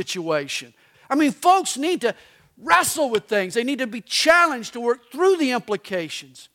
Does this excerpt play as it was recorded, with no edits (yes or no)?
no